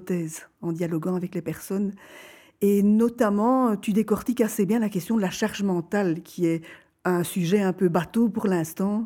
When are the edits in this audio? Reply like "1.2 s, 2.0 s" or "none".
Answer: none